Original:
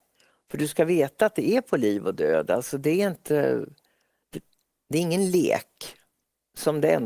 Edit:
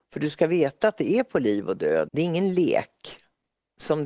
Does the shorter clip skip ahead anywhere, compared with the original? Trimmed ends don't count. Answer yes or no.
yes